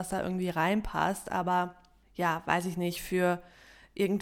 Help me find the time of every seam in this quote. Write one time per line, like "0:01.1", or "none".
none